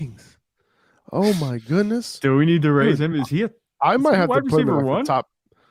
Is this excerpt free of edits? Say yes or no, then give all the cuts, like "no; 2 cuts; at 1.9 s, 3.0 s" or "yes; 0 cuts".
yes; 0 cuts